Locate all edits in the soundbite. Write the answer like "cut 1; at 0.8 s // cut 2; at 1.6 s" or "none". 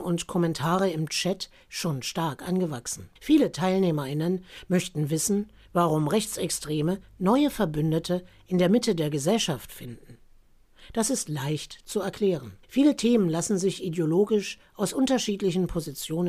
cut 1; at 3.2 s // cut 2; at 12.6 s